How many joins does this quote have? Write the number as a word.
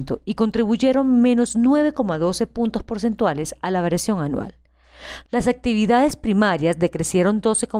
one